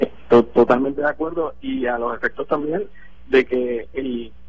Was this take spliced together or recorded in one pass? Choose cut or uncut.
uncut